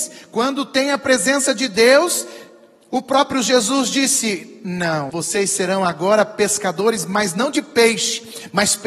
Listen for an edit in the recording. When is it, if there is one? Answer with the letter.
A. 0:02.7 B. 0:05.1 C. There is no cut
B